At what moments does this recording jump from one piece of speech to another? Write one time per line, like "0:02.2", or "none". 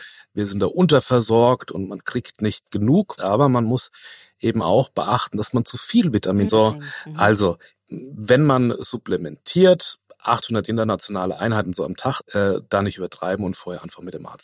0:03.2
0:06.5
0:12.2